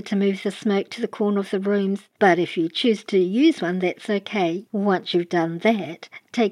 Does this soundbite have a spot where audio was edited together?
yes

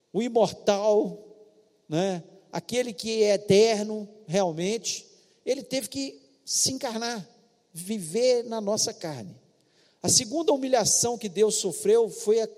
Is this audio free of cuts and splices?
yes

